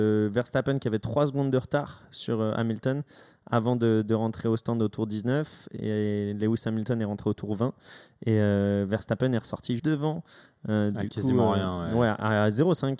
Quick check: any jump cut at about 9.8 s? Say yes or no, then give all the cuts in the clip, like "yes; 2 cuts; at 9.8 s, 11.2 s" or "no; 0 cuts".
yes; 1 cut; at 9.8 s